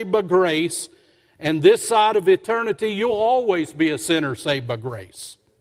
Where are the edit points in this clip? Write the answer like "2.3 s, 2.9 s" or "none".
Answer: none